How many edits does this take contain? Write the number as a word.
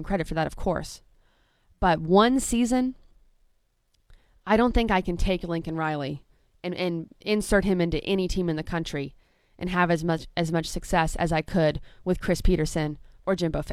zero